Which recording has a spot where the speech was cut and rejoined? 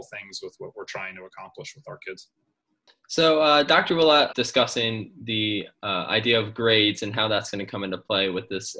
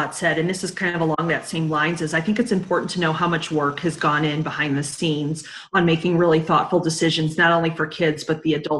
first; 1 cut; at 4.3 s

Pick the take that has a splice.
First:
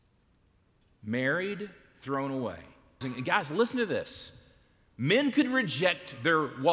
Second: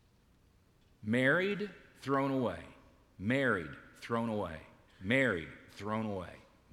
first; 1 cut; at 3.0 s

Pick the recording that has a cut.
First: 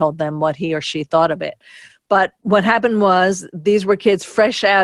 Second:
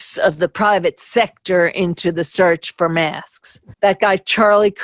second; 1 cut; at 3.7 s

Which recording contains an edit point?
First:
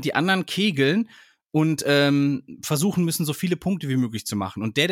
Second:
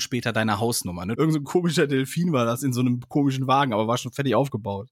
second; 1 cut; at 1.1 s

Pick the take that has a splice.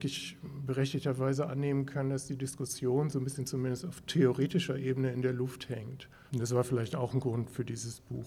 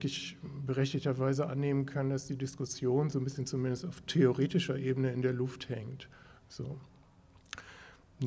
first; 1 cut; at 6.3 s

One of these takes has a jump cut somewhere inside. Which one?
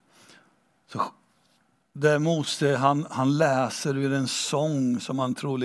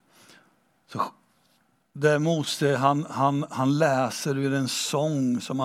first; 1 cut; at 3.1 s

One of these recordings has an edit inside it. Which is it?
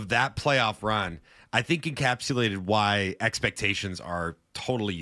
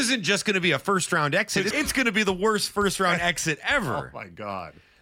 second; 1 cut; at 1.7 s

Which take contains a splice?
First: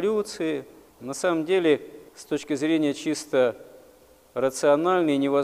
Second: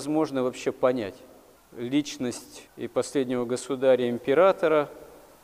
second; 1 cut; at 2.7 s

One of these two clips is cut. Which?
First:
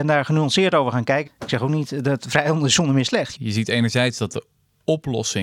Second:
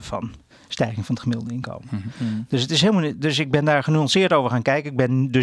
first; 2 cuts; at 1.3 s, 3.4 s

